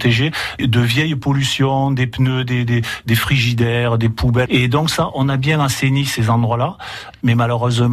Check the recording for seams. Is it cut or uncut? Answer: cut